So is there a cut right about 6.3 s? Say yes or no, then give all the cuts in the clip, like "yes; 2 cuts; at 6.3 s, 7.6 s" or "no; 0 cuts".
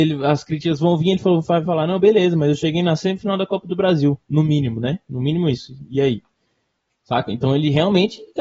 no; 0 cuts